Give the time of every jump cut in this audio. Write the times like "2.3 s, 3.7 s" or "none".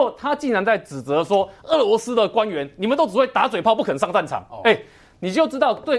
none